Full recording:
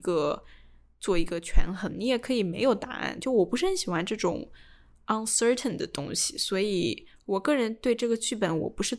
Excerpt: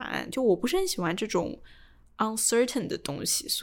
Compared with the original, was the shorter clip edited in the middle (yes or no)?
no